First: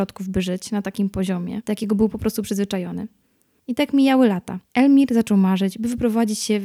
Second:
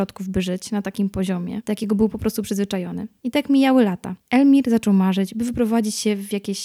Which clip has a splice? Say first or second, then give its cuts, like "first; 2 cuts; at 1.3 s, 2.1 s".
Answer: second; 1 cut; at 3.2 s